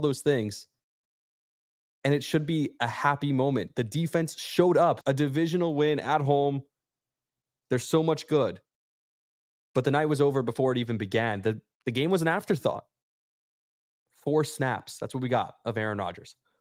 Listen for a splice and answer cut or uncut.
cut